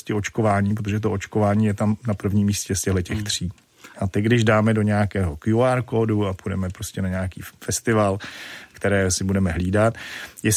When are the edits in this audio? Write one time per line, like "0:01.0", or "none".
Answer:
0:03.9
0:08.7